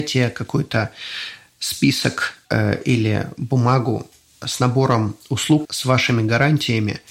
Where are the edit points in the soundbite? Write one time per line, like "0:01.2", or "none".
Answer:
0:02.4
0:05.6